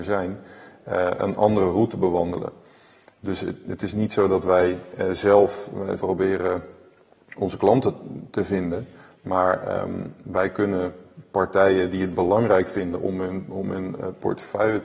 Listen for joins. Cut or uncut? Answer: cut